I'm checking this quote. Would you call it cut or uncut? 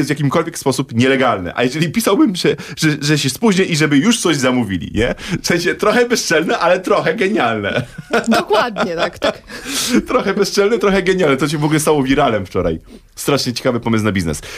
uncut